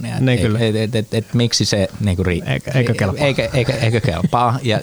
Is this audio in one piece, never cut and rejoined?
yes; 0 cuts

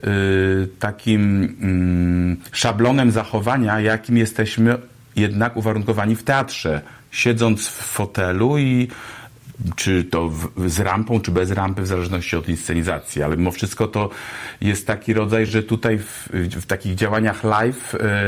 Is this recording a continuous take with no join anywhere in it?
yes; 0 cuts

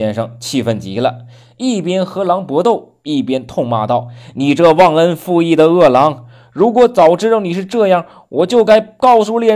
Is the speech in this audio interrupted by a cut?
no; 0 cuts

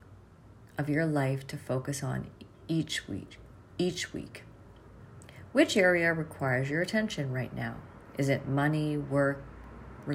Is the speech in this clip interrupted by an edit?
no; 0 cuts

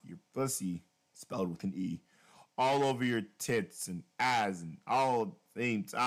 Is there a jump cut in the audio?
no; 0 cuts

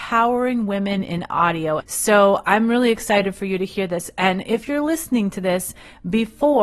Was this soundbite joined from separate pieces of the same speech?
yes; 1 cut; at 1.8 s

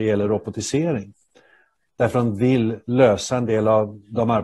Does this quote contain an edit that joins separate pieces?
no; 0 cuts

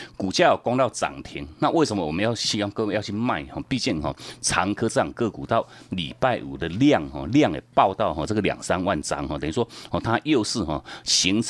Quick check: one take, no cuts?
yes; 0 cuts

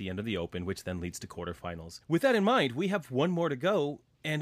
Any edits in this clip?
yes; 1 cut; at 2.0 s

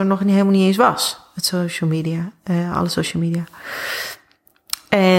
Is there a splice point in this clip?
no; 0 cuts

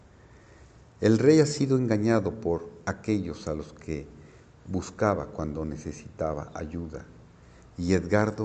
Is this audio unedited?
yes; 0 cuts

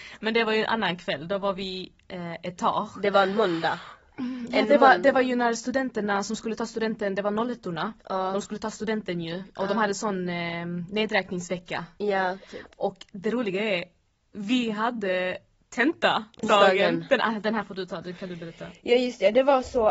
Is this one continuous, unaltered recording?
no; 1 cut; at 16.4 s

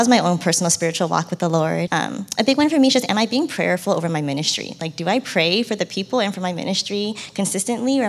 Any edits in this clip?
yes; 1 cut; at 1.9 s

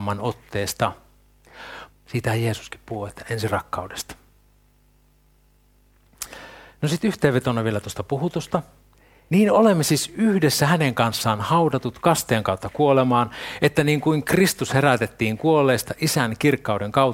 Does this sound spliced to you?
yes; 2 cuts; at 1.9 s, 9.3 s

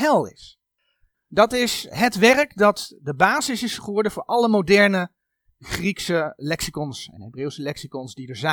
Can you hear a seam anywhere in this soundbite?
yes; 2 cuts; at 1.1 s, 6.4 s

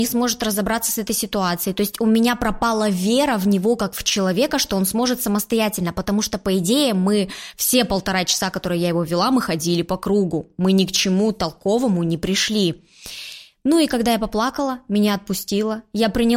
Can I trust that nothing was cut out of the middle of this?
yes; 0 cuts

